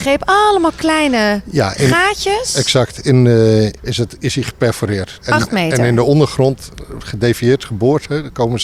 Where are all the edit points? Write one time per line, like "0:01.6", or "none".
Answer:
0:03.8
0:05.2